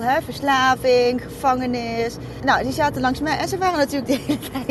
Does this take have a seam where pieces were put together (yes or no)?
yes